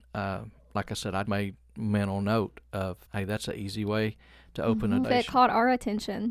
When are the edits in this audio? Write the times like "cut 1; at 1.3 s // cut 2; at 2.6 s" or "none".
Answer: cut 1; at 1.3 s // cut 2; at 3.1 s // cut 3; at 5.0 s